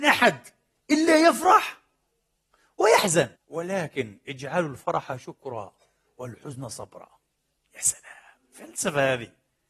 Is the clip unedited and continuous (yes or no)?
no